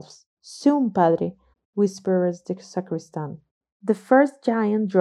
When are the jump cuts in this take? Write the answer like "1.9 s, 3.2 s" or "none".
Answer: 1.5 s